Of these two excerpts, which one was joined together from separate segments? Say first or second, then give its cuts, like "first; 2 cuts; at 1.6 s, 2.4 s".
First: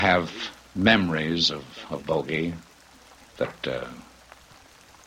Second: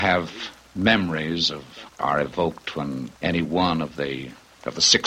second; 2 cuts; at 1.9 s, 3.2 s